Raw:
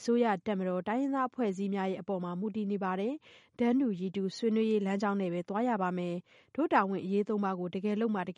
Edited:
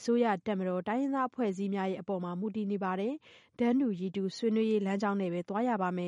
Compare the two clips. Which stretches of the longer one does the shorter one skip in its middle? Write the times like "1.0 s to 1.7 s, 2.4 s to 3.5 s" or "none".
none